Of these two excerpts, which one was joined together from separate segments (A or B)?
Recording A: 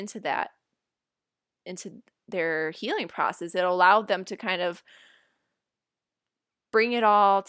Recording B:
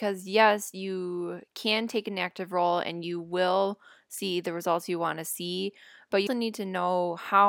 B